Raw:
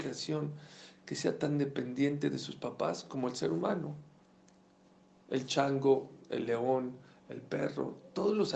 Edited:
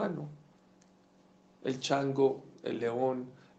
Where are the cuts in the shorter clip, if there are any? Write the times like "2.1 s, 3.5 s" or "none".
none

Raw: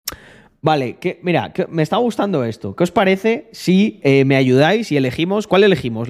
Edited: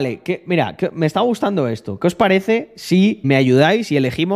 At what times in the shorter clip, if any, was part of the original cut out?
3.2 s

